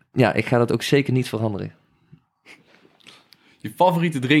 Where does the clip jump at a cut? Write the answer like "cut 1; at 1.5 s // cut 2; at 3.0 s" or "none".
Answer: none